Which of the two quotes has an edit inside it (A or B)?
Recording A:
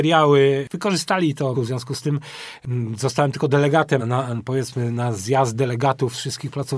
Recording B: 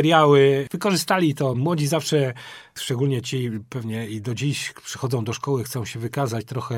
A